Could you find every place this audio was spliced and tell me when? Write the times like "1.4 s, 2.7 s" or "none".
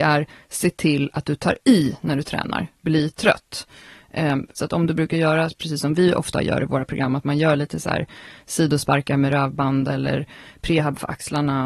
4.6 s